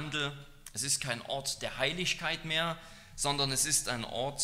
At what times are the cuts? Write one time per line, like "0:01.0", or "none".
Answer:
none